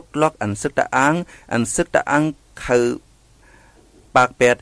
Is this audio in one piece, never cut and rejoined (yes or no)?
yes